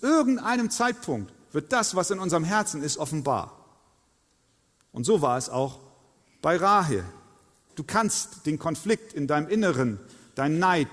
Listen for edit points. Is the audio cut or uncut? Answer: cut